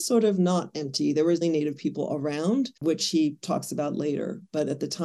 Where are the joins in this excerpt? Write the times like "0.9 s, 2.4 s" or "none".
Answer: 1.4 s, 2.8 s